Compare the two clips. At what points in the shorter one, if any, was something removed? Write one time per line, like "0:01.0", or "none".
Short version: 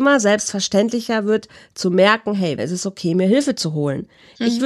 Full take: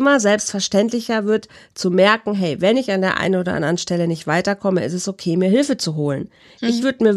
0:02.6